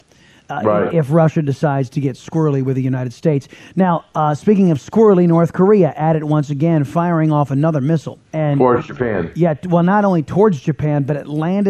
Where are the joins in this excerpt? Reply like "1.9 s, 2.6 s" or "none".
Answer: 8.2 s